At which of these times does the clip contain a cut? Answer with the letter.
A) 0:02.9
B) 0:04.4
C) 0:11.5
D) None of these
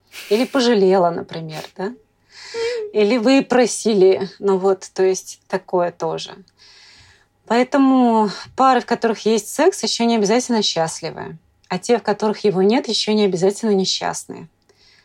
D